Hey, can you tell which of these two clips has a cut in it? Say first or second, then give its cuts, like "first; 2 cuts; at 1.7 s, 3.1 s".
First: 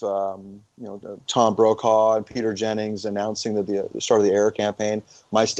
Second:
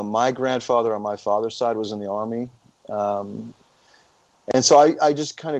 first; 1 cut; at 1.2 s